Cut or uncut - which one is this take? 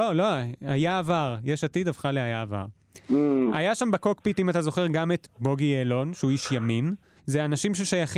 cut